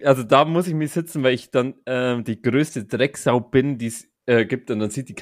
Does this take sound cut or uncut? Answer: uncut